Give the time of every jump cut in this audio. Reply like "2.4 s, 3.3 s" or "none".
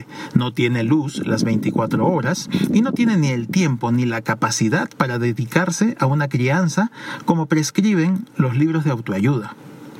none